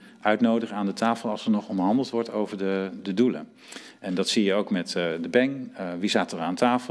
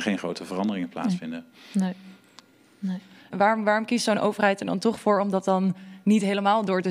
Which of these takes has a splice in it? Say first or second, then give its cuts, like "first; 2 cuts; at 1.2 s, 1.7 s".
second; 1 cut; at 3.3 s